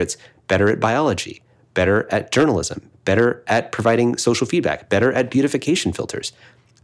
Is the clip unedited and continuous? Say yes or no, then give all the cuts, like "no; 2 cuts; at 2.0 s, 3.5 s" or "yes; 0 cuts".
no; 1 cut; at 2.9 s